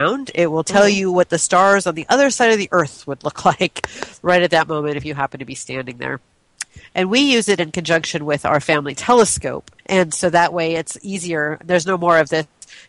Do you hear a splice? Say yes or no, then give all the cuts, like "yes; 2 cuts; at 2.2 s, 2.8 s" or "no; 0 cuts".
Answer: yes; 1 cut; at 9.8 s